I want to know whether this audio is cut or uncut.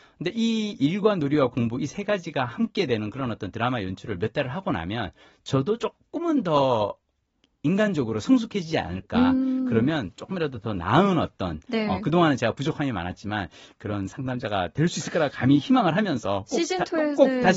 uncut